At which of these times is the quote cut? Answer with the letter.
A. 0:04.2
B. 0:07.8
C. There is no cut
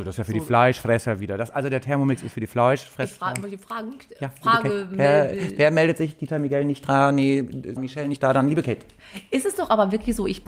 B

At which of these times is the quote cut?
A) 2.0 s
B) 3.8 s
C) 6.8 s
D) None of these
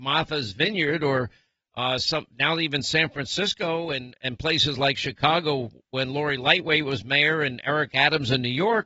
D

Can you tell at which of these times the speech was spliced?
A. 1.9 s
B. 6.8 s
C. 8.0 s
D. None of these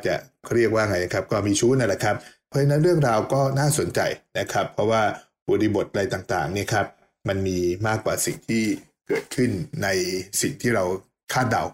D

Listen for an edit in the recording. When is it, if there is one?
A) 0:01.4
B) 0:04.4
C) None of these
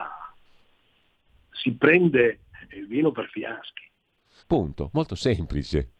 B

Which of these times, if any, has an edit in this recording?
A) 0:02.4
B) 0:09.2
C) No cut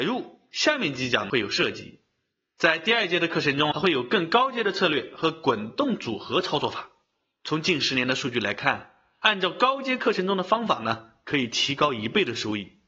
C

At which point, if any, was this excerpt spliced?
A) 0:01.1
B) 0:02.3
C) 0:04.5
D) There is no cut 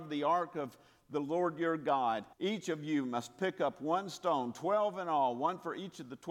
B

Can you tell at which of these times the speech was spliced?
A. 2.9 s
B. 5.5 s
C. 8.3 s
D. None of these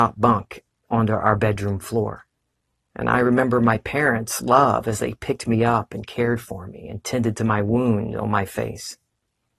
A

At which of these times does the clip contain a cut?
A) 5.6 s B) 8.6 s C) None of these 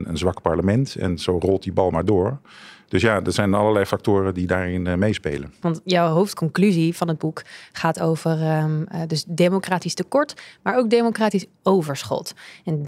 A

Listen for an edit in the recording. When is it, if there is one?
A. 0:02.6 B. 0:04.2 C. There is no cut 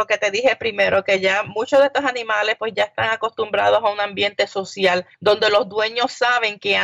C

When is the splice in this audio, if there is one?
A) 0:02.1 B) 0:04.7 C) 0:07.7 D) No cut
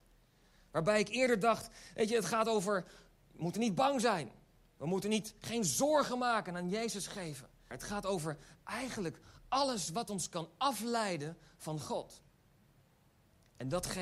C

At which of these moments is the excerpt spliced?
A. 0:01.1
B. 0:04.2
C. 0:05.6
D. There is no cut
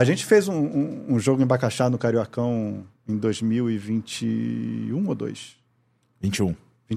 D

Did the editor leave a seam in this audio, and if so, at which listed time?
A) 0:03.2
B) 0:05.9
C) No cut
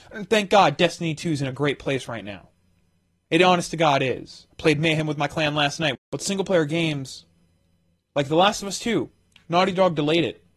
B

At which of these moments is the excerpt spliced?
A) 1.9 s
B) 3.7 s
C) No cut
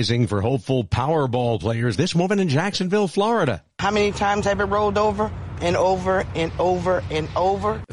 A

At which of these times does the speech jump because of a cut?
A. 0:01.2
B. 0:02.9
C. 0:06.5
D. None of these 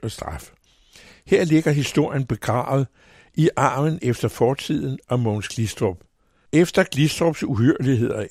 C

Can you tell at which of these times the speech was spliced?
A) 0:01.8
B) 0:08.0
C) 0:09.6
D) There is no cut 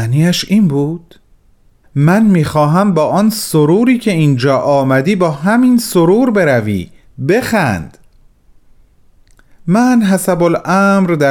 A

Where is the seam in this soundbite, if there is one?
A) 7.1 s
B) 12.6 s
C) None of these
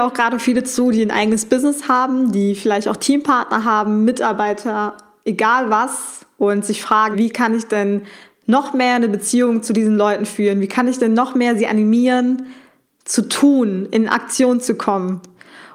A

